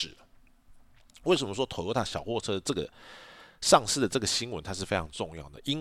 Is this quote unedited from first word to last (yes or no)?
yes